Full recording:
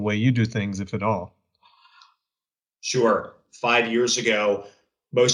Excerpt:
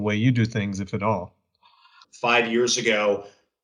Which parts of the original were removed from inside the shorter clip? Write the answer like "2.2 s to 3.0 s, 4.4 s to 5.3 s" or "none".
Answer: 2.0 s to 3.4 s